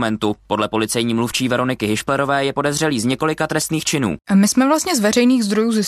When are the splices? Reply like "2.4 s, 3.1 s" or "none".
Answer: 4.2 s

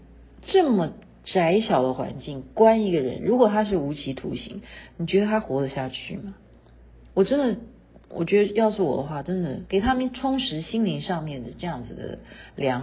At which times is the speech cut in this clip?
9.7 s

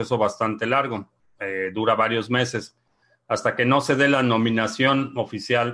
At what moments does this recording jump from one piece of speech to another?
1.4 s

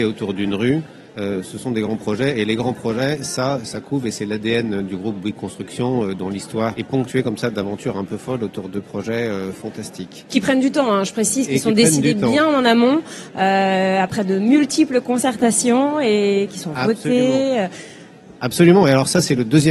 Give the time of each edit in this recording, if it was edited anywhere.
1.1 s, 6.7 s

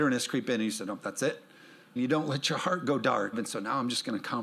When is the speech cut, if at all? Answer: 2.0 s, 3.3 s

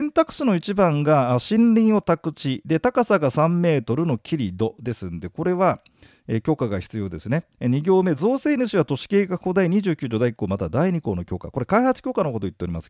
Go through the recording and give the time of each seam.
none

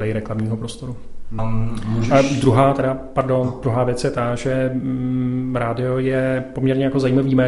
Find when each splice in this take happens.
1.4 s

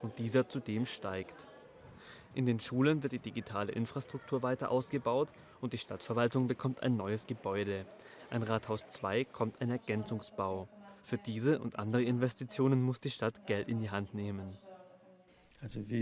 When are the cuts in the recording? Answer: none

